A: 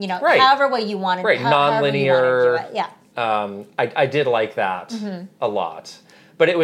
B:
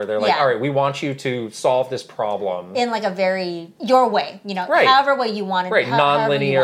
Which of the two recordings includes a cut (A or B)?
B